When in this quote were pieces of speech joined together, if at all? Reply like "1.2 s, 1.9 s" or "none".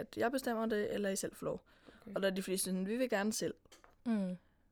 none